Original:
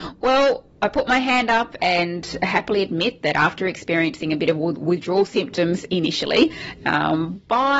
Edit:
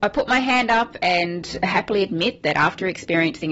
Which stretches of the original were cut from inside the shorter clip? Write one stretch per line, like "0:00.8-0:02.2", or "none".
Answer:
none